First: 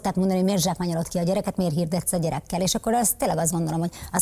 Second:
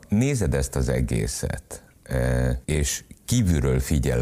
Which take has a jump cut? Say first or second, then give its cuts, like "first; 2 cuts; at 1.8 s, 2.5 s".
second; 1 cut; at 2.6 s